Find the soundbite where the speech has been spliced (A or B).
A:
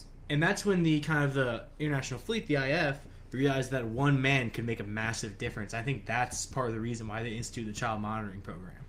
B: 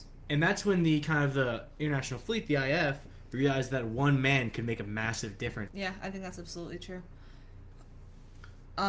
B